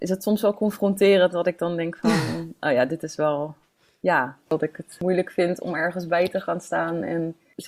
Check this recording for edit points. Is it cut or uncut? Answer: uncut